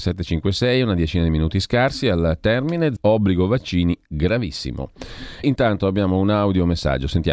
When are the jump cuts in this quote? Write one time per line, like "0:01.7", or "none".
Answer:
0:03.0
0:05.4